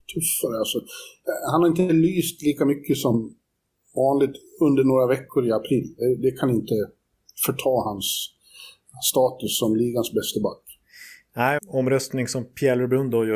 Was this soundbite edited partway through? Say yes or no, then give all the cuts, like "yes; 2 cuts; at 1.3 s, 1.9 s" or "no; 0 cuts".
yes; 1 cut; at 11.6 s